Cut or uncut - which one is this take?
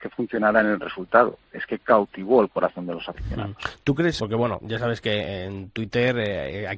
cut